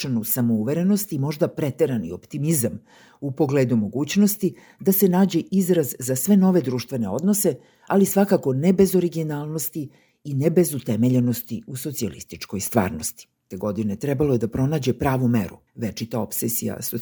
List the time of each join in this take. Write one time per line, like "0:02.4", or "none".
0:13.5
0:15.7